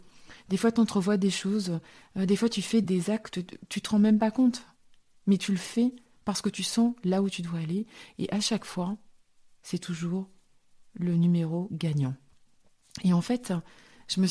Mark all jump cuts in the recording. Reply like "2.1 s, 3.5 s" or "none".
2.8 s